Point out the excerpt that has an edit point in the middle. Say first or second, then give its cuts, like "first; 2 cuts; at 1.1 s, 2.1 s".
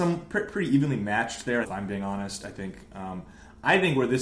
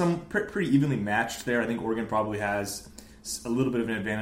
first; 1 cut; at 1.6 s